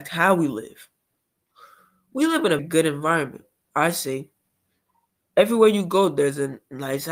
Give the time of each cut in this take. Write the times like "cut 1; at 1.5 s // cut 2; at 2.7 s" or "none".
cut 1; at 2.6 s